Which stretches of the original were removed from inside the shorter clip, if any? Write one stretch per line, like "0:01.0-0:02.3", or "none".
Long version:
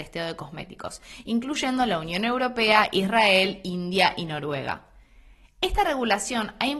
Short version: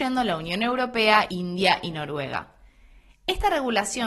0:02.9-0:03.6